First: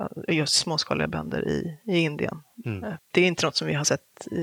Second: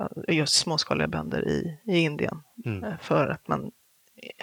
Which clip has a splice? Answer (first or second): first